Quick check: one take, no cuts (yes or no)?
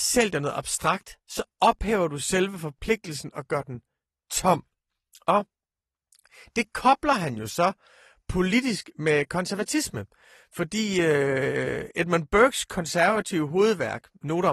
yes